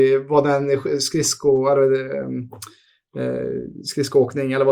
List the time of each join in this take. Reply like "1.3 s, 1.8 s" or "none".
none